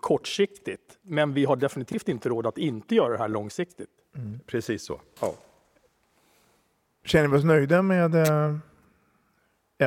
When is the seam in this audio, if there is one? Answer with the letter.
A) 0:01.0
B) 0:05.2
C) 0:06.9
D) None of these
B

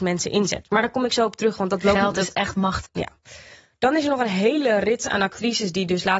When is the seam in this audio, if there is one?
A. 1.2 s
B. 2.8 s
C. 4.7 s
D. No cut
B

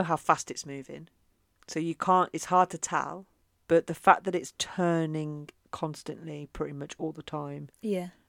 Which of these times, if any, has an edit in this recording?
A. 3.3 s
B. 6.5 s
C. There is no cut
C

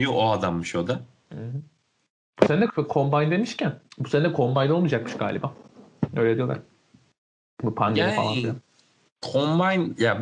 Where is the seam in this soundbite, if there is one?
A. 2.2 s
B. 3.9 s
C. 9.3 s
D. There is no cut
B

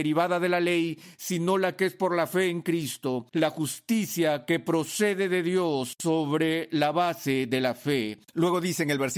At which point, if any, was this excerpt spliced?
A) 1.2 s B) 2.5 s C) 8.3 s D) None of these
C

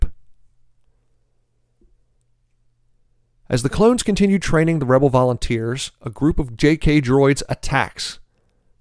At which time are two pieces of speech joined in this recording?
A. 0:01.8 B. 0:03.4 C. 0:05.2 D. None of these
D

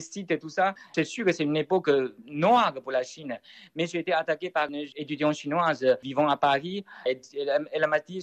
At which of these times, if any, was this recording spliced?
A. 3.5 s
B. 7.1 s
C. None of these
B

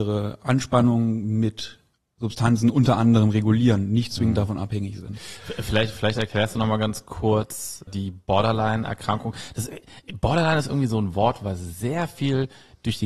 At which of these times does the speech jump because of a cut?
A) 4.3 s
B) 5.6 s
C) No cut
C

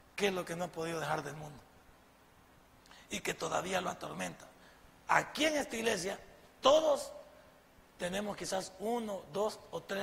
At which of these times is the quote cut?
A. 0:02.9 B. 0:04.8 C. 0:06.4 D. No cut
D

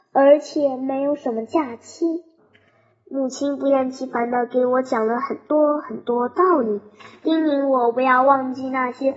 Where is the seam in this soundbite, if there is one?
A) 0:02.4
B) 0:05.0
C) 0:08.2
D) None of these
A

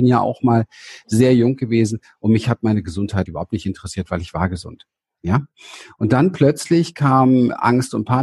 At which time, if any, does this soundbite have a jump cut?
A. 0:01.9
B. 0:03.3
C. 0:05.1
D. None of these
B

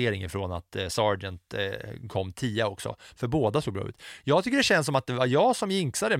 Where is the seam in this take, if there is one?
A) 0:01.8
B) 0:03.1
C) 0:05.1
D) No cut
D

